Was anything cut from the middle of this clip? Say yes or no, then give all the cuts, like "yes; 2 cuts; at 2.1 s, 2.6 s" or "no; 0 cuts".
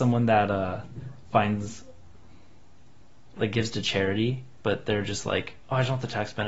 no; 0 cuts